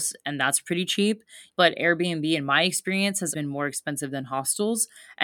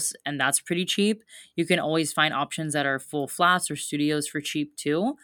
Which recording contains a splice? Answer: first; 2 cuts; at 1.5 s, 3.3 s

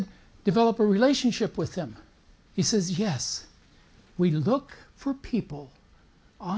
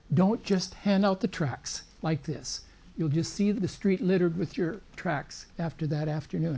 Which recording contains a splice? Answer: second; 1 cut; at 5.5 s

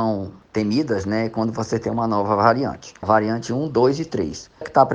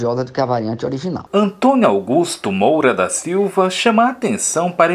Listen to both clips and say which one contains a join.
first; 1 cut; at 3.0 s

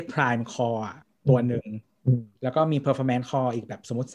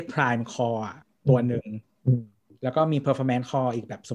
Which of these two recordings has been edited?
first; 1 cut; at 2.3 s

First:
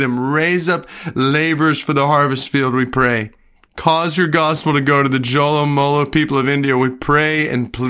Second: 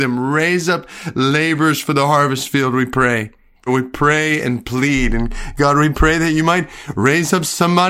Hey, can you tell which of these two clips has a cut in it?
second; 1 cut; at 3.7 s

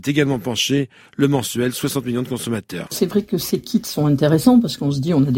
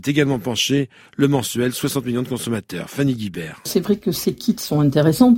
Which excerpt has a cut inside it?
first; 1 cut; at 2.9 s

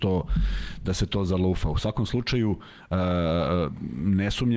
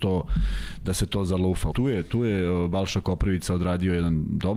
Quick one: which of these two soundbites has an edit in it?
second; 1 cut; at 1.7 s

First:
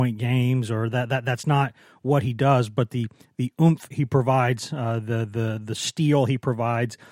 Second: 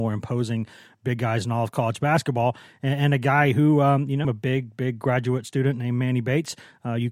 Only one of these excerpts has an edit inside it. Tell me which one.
second; 1 cut; at 4.2 s

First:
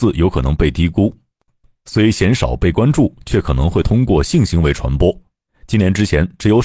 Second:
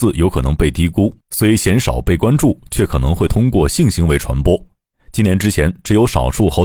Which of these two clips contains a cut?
second; 1 cut; at 1.2 s

